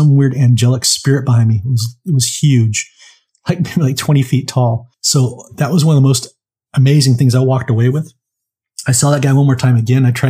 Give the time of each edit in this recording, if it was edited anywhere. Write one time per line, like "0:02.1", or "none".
0:04.9